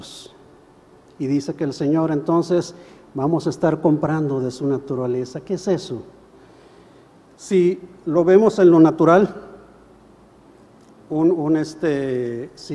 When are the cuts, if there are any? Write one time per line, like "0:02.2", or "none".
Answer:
none